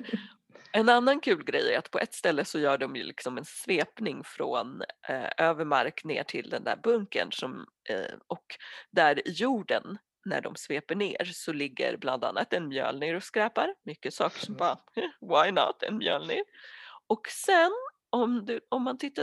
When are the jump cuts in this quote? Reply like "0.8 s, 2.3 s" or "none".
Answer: none